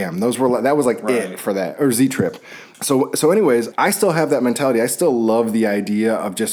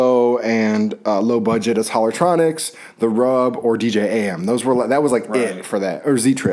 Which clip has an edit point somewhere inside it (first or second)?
first